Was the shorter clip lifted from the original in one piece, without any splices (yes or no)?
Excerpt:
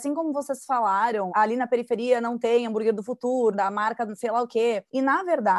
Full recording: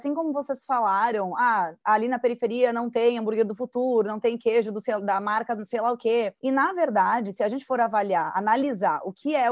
no